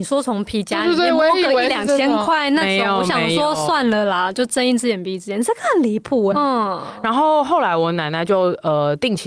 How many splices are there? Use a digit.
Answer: 1